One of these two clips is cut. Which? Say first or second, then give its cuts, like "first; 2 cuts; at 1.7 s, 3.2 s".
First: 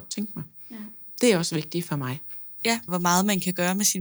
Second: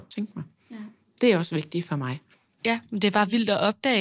first; 1 cut; at 2.9 s